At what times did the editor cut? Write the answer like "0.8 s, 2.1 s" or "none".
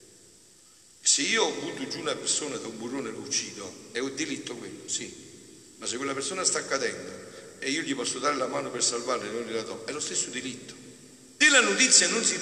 11.4 s

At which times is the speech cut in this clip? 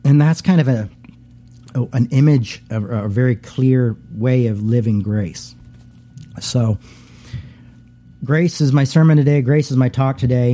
none

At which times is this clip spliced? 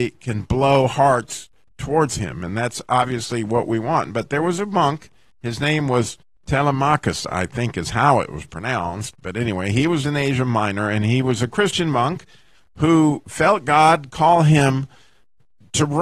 none

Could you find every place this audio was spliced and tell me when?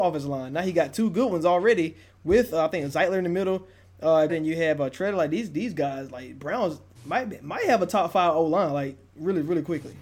4.3 s

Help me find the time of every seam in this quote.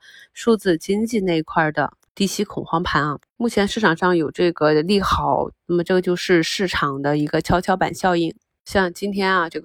3.2 s, 5.6 s

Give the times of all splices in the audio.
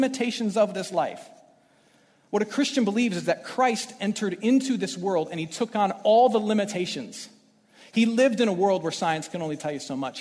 none

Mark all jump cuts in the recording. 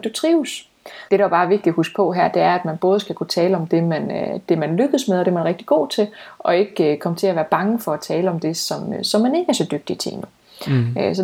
1.1 s

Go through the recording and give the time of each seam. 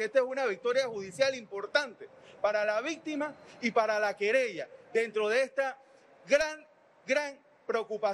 none

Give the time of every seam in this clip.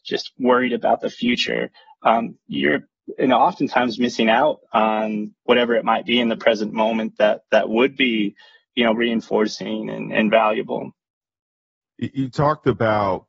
none

